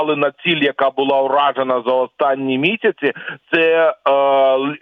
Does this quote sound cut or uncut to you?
uncut